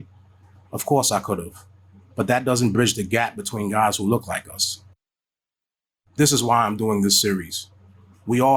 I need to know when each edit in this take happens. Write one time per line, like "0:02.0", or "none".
none